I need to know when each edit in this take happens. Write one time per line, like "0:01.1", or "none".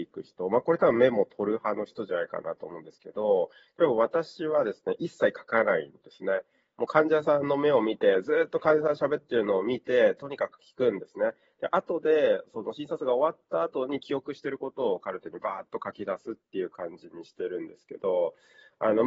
none